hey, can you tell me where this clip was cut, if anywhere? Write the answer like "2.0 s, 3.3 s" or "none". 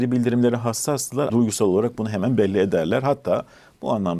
1.3 s